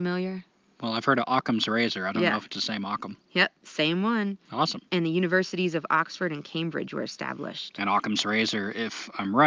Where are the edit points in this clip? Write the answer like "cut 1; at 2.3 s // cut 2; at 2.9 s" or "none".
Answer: none